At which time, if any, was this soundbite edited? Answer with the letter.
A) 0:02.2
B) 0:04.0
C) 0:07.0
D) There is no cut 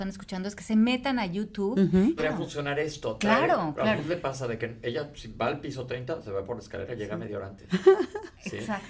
A